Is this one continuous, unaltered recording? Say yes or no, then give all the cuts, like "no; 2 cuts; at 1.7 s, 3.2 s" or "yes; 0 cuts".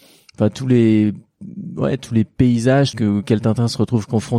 no; 1 cut; at 2.9 s